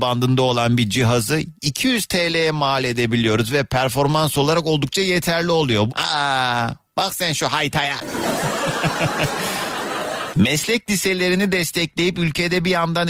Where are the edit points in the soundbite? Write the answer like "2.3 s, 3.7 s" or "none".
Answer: 5.9 s, 10.3 s